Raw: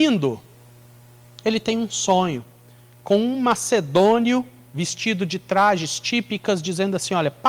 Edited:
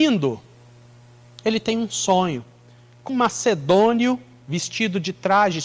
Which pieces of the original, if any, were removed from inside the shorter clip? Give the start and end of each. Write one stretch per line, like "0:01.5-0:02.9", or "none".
0:03.1-0:03.4